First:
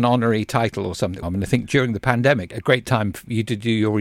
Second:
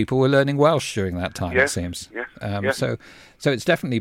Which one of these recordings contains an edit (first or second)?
first